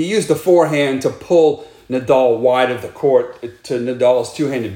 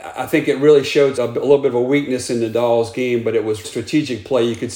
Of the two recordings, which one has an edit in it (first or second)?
second